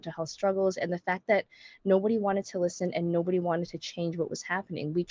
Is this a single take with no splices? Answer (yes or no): yes